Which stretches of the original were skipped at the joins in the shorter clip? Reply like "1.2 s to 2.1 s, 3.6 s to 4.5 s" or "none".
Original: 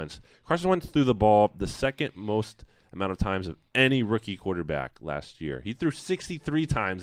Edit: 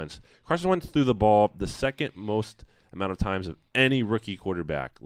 none